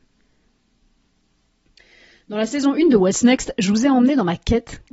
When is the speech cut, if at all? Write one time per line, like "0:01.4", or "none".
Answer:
none